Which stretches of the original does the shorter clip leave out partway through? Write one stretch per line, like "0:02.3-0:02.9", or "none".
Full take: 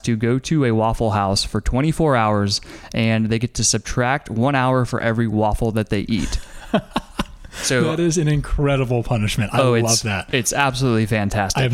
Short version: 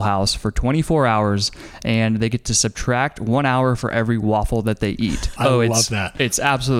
0:06.5-0:09.5